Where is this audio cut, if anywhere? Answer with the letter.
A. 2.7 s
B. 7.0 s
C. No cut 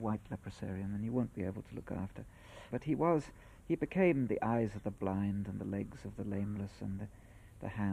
A